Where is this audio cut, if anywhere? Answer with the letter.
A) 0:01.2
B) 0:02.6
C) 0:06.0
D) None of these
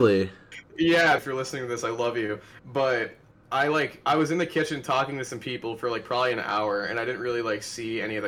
A